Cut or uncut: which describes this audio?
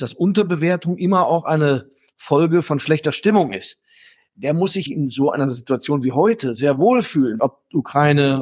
cut